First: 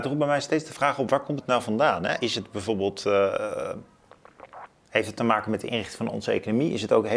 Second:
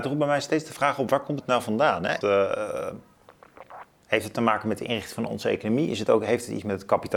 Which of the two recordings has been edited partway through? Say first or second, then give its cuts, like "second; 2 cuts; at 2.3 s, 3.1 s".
second; 1 cut; at 2.2 s